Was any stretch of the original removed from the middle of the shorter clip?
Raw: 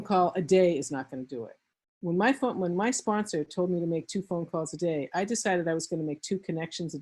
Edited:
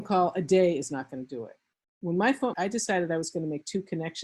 yes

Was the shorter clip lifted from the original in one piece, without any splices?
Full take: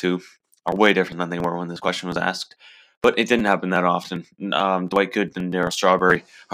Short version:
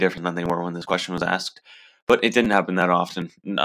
yes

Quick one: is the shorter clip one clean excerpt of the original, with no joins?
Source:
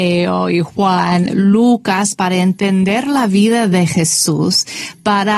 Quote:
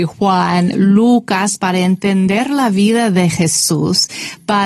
yes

